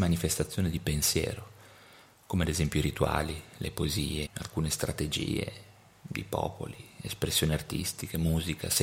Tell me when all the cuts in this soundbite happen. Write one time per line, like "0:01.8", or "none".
0:04.3